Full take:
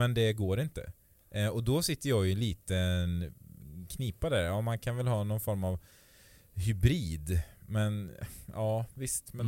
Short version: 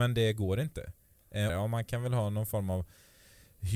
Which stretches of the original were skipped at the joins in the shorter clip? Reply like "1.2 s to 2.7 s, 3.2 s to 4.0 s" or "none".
1.5 s to 4.4 s